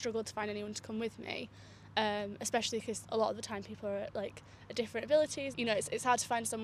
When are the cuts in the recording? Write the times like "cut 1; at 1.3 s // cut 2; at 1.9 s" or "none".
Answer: cut 1; at 3.0 s // cut 2; at 5.5 s